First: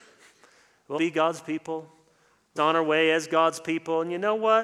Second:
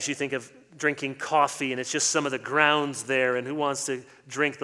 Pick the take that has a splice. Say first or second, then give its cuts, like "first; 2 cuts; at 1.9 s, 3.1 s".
first; 2 cuts; at 0.9 s, 2.6 s